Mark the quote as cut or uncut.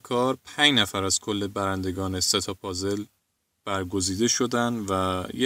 uncut